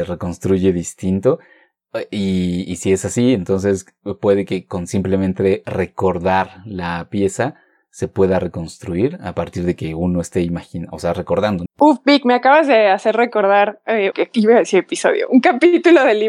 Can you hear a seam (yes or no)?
yes